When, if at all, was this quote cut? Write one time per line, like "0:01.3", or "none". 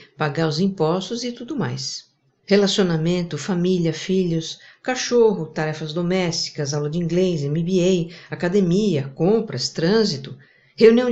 0:02.4